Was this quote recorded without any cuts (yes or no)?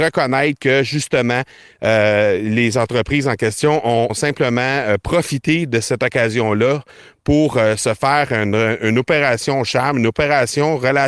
no